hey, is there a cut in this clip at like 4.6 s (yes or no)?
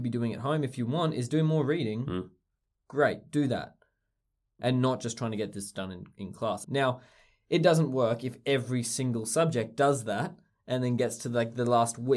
yes